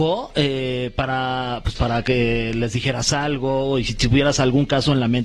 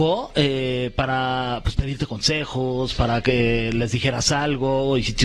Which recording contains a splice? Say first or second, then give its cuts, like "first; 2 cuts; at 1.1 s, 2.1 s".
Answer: first; 1 cut; at 1.7 s